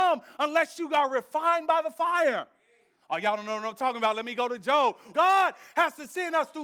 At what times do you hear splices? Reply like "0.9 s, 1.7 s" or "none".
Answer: 5.1 s